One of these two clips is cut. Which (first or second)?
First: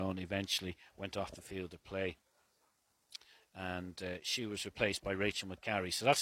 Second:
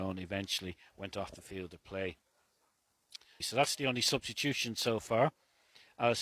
second